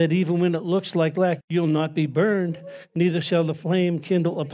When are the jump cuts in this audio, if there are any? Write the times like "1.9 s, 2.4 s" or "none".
1.4 s